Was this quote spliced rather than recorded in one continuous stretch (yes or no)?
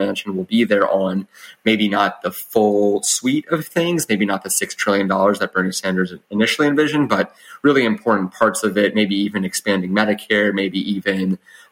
no